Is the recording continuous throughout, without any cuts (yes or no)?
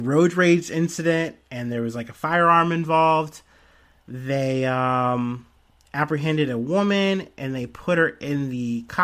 yes